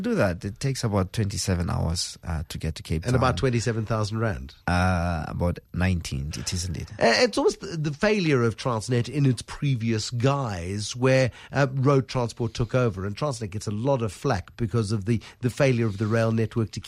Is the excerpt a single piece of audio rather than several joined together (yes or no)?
no